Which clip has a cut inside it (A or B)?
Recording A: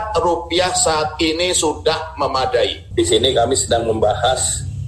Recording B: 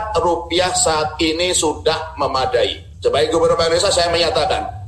A